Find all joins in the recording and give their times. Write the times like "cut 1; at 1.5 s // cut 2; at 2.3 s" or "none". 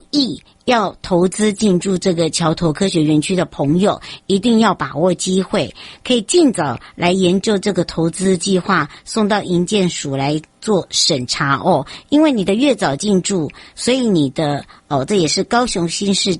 cut 1; at 14.8 s